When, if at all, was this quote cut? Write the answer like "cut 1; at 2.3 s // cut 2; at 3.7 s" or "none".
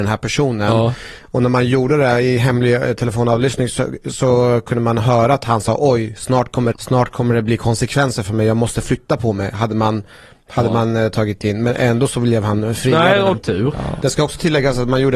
cut 1; at 6.7 s // cut 2; at 13.3 s